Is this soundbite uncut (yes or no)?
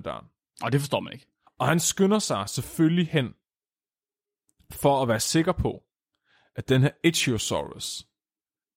no